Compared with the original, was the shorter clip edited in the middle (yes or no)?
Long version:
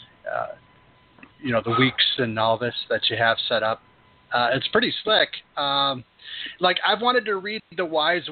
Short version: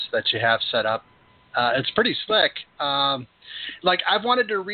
no